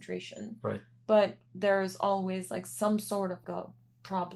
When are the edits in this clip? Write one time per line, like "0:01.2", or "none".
0:03.4